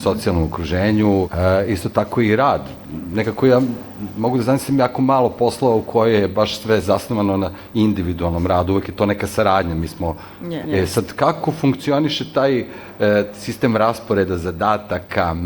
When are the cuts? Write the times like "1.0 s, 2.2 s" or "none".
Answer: 1.2 s, 10.6 s